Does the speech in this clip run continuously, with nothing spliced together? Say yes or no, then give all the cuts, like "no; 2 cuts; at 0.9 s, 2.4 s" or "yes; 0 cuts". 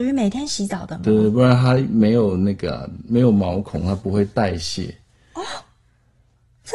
yes; 0 cuts